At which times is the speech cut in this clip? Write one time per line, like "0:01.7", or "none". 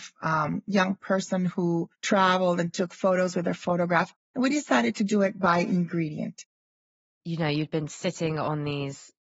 0:01.9
0:04.1